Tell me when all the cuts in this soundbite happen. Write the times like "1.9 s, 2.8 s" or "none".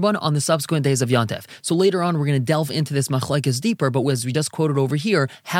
none